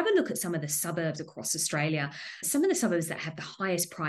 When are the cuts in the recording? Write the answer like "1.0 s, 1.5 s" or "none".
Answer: 2.4 s